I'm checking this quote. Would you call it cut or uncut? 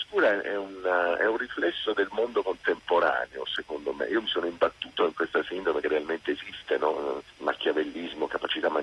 uncut